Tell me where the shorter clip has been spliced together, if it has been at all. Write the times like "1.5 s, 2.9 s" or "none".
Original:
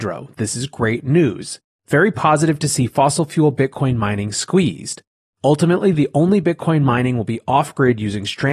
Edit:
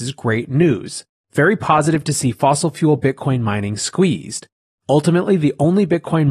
none